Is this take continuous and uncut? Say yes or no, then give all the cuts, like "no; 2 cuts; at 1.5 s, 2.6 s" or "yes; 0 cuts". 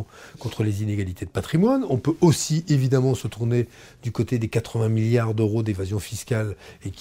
yes; 0 cuts